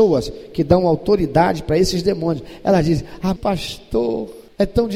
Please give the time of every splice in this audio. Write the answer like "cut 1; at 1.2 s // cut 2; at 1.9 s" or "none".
cut 1; at 3.4 s